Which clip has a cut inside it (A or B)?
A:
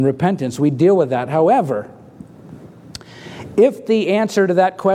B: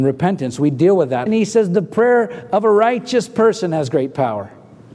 B